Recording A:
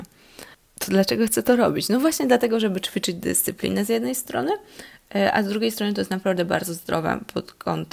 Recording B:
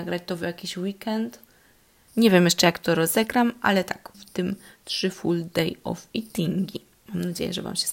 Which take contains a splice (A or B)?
B